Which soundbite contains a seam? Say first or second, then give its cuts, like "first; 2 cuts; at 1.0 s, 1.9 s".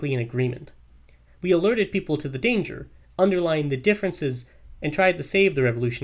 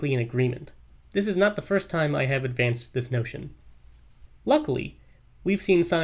second; 2 cuts; at 1.0 s, 4.3 s